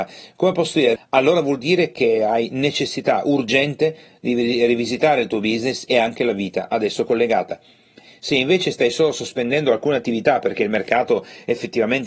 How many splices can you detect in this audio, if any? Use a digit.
1